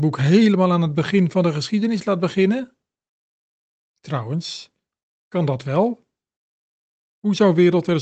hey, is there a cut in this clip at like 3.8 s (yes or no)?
yes